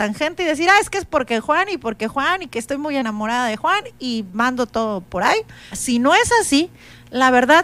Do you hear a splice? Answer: yes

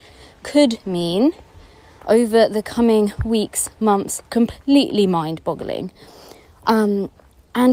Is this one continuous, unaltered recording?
no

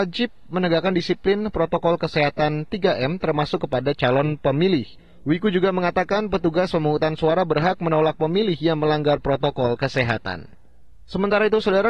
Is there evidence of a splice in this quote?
no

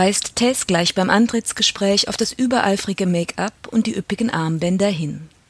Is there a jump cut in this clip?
no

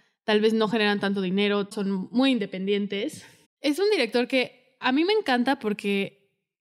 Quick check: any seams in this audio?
yes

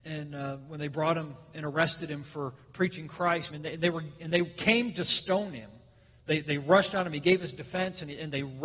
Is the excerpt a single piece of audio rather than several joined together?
no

